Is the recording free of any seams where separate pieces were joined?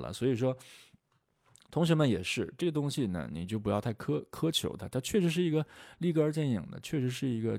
yes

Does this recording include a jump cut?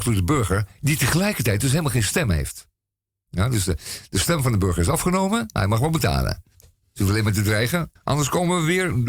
yes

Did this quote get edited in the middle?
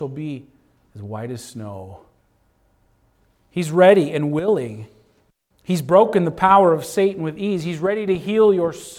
no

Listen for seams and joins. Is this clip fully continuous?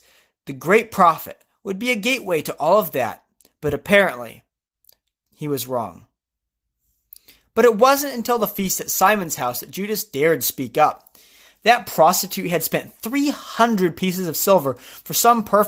yes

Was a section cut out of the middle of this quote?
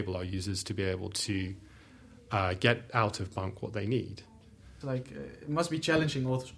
yes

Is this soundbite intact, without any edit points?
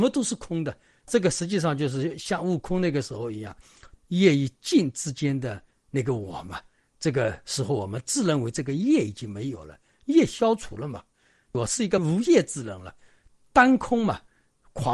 no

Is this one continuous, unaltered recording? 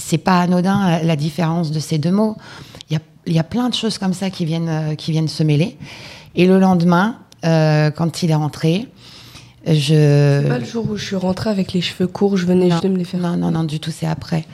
no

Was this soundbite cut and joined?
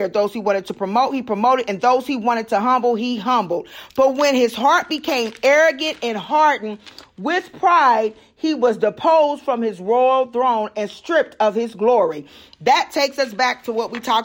no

